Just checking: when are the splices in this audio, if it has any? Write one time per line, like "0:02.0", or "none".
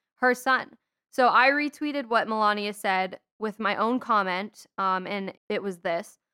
0:05.4